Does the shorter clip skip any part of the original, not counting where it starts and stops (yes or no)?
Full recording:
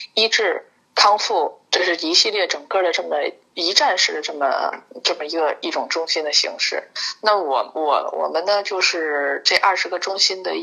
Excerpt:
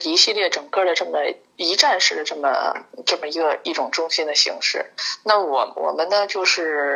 yes